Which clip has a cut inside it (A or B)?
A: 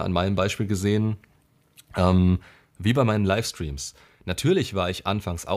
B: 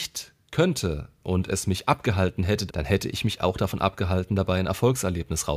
B